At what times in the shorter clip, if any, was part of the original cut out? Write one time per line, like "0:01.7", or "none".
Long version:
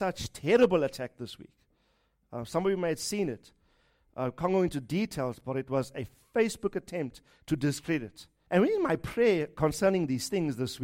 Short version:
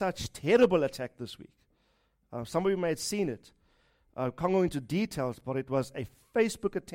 none